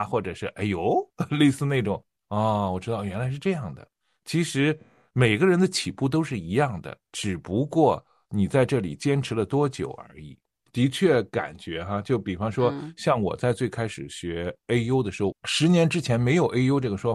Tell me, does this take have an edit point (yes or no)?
yes